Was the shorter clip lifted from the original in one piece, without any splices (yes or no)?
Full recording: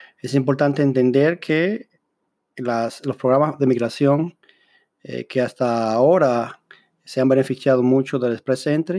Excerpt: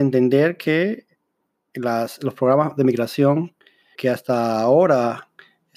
no